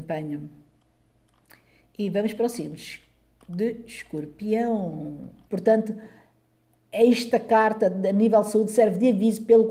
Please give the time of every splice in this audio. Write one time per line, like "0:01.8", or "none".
0:05.5